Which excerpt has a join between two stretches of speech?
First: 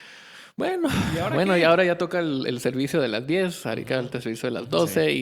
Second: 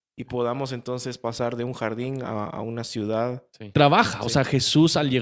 second; 1 cut; at 3.7 s

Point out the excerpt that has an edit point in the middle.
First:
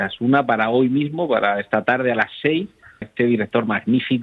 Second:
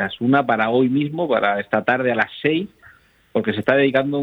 first; 1 cut; at 3.0 s

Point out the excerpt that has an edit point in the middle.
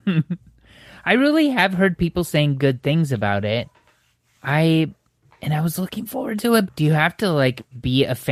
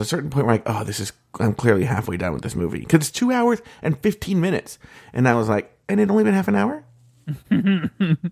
first; 1 cut; at 6.7 s

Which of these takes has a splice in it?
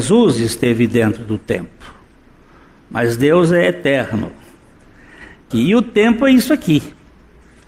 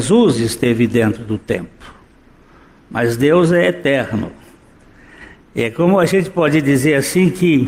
first; 1 cut; at 5.5 s

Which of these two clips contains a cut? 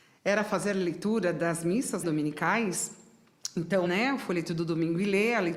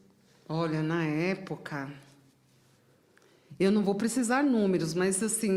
first; 2 cuts; at 2.0 s, 3.9 s

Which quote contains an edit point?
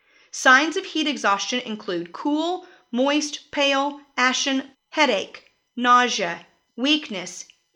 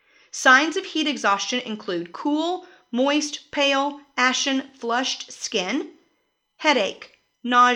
first; 2 cuts; at 4.7 s, 6.7 s

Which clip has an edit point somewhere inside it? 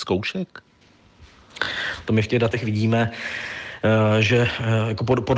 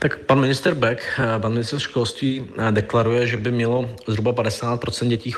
first; 1 cut; at 2.0 s

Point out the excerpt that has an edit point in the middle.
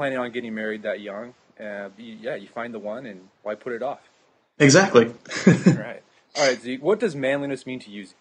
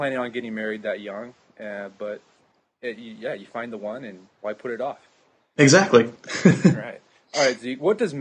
first; 1 cut; at 2.0 s

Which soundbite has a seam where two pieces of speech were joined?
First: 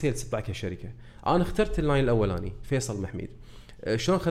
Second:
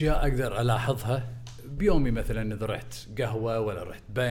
second; 1 cut; at 1.8 s

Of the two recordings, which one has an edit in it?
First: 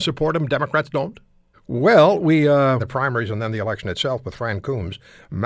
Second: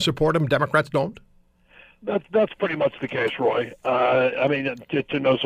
first; 2 cuts; at 1.5 s, 2.8 s

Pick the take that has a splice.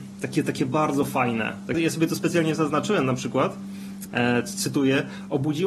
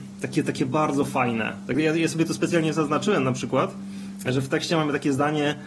first; 2 cuts; at 1.7 s, 4.1 s

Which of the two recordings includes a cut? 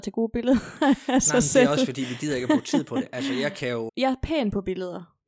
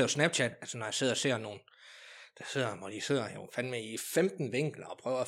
first; 1 cut; at 3.9 s

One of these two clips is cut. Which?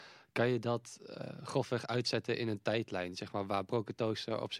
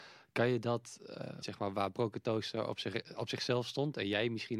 second; 1 cut; at 1.4 s

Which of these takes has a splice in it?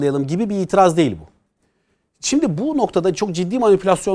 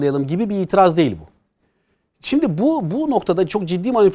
first; 1 cut; at 2.6 s

